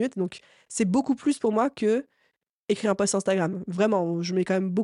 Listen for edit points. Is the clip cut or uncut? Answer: uncut